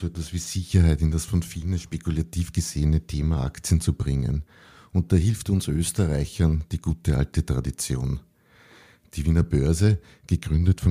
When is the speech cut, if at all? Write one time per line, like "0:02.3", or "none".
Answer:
none

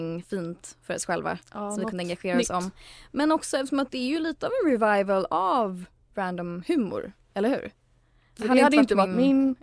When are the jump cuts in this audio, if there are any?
0:08.4

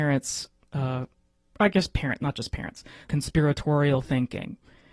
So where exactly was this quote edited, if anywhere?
0:03.0

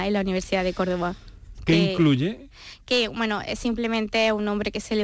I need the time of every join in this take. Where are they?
0:01.5

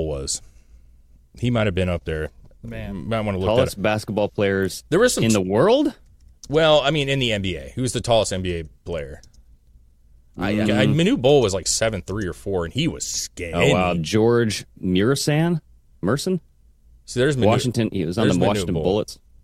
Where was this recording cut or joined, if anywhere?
0:10.6
0:13.9

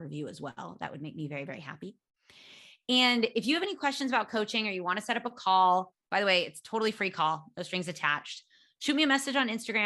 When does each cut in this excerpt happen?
none

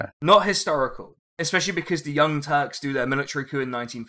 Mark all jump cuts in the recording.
0:01.2

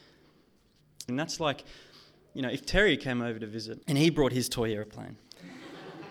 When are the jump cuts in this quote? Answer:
0:01.1
0:03.8

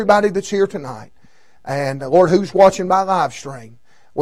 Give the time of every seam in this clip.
none

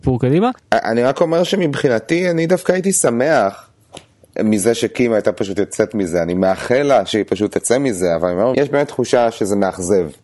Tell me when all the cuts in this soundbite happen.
0:08.5

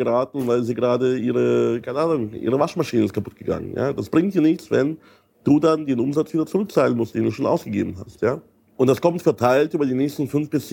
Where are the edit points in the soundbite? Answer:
0:07.1

